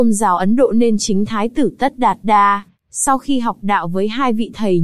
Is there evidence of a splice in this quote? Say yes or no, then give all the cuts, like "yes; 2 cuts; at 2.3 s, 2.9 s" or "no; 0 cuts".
no; 0 cuts